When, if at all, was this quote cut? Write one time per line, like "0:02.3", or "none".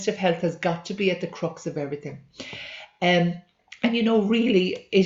none